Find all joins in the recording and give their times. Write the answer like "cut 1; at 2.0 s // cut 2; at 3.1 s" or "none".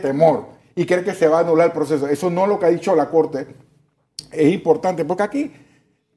none